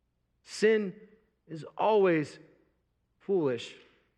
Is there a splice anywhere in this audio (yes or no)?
no